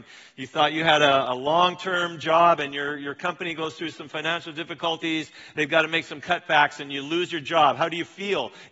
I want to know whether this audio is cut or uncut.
uncut